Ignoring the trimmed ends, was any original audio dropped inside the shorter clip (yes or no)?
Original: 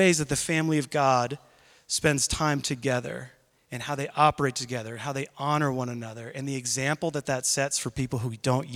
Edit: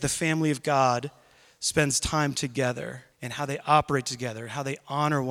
yes